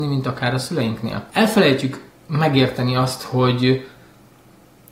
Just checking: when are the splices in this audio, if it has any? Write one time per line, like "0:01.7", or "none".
0:01.3